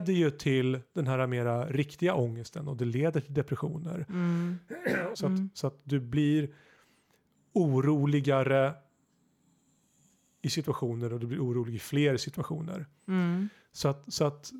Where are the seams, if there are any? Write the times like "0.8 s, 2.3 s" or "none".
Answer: 5.1 s